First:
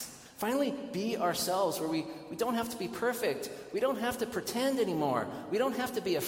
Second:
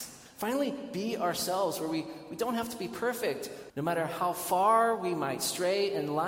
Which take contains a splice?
second; 1 cut; at 3.7 s

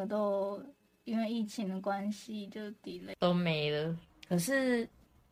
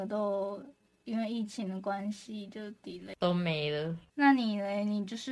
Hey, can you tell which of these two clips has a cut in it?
first; 1 cut; at 4.1 s

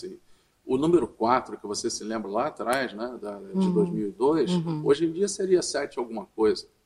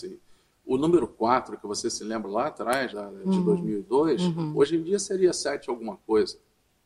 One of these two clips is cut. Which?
second; 1 cut; at 2.9 s

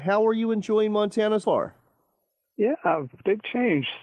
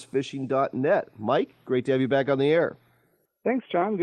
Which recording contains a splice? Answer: first; 1 cut; at 1.4 s

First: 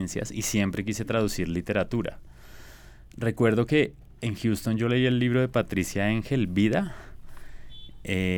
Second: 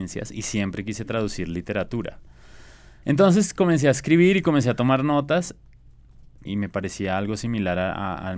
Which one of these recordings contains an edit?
second; 2 cuts; at 3.0 s, 6.5 s

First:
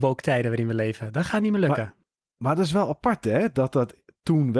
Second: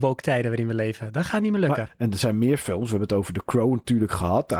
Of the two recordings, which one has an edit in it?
second; 1 cut; at 1.9 s

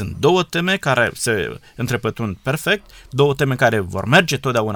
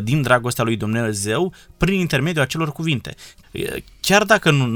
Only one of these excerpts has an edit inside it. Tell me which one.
second; 1 cut; at 3.4 s

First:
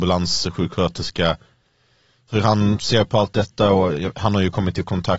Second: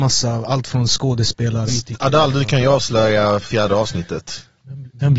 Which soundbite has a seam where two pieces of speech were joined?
second; 1 cut; at 1.7 s

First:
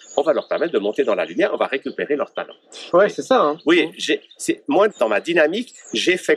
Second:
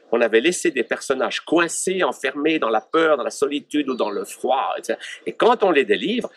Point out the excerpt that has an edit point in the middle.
first; 2 cuts; at 2.9 s, 4.9 s

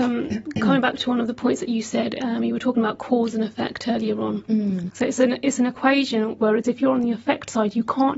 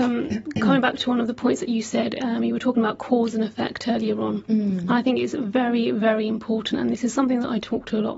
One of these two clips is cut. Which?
first; 2 cuts; at 4.9 s, 6.4 s

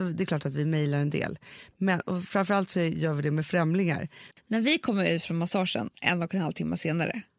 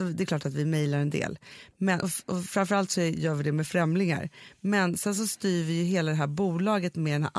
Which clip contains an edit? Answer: first; 2 cuts; at 2.0 s, 4.3 s

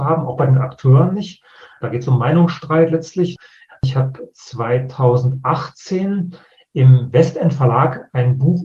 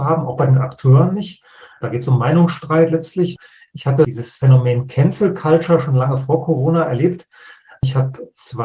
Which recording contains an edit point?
first; 1 cut; at 3.7 s

